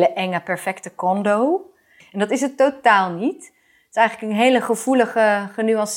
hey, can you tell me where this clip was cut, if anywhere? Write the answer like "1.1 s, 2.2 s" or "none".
2.0 s